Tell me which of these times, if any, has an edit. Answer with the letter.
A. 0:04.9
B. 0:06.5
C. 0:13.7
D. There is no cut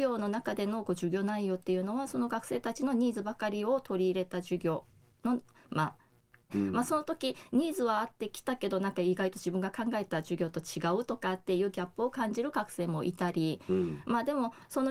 B